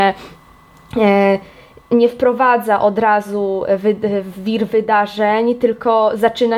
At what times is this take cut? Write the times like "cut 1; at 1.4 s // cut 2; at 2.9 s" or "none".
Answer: none